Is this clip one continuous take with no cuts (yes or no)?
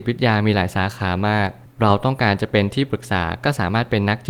yes